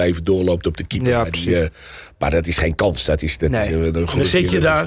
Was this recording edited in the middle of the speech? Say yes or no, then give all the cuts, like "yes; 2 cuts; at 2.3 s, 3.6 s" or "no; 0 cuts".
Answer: no; 0 cuts